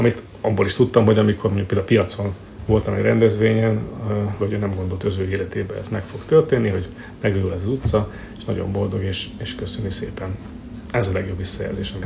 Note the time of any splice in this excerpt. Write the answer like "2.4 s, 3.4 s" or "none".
4.4 s